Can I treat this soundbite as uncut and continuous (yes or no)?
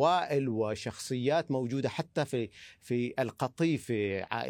yes